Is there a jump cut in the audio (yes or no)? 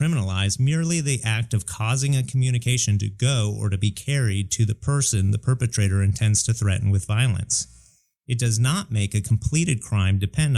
no